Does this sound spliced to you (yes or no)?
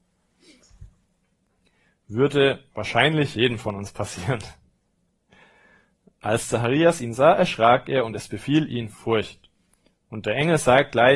no